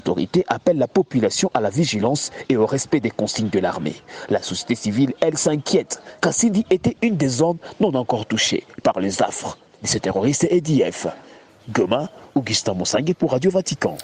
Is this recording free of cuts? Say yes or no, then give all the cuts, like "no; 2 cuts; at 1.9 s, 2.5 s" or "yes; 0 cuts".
no; 1 cut; at 6.2 s